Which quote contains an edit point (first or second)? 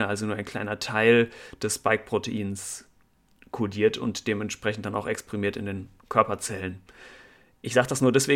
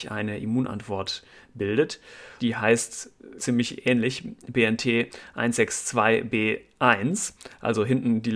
second